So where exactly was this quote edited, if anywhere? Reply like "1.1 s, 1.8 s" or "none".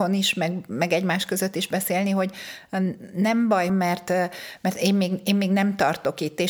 3.7 s